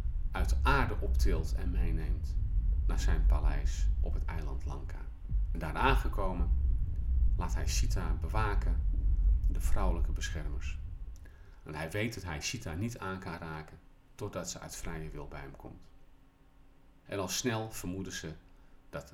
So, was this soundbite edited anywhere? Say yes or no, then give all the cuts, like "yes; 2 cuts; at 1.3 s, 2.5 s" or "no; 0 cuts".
yes; 1 cut; at 17.1 s